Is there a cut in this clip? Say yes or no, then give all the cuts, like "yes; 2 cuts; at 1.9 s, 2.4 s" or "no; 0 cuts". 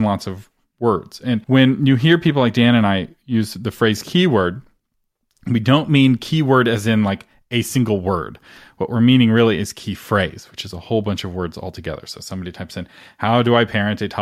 yes; 1 cut; at 1.4 s